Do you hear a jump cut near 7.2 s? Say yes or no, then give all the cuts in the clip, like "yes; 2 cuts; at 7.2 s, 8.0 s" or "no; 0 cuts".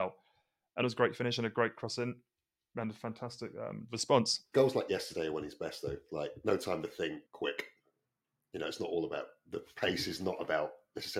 yes; 2 cuts; at 4.5 s, 7.2 s